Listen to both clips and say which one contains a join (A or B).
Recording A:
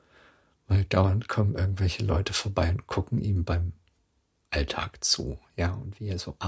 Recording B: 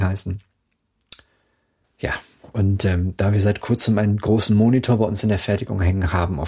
B